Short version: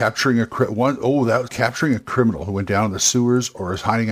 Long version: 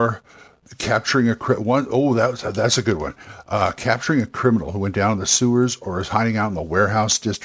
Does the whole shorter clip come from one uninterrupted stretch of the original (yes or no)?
no